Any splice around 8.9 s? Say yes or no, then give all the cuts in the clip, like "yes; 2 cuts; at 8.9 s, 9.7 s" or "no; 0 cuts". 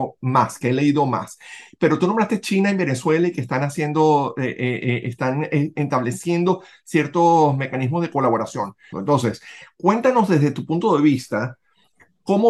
yes; 1 cut; at 8.9 s